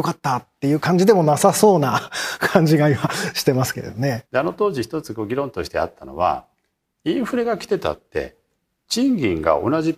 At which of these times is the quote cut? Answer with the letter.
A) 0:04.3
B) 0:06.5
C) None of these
A